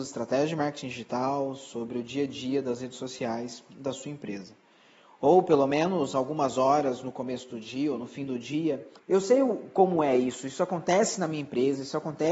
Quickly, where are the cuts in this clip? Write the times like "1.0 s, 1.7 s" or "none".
9.0 s